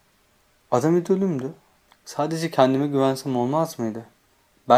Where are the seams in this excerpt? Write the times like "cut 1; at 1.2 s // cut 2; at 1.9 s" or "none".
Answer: cut 1; at 1.9 s